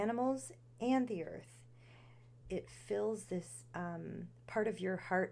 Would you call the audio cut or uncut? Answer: cut